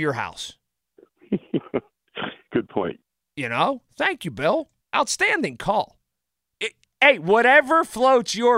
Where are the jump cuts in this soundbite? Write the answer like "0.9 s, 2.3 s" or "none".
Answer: 4.8 s